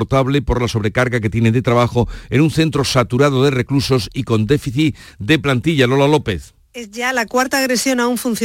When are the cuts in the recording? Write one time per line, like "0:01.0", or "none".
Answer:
0:06.6